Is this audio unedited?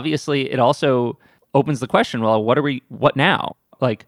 yes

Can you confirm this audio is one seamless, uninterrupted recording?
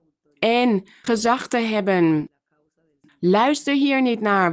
no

